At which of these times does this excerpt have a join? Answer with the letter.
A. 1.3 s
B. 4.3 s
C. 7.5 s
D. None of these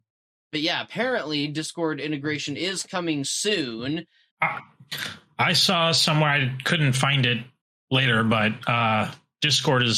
B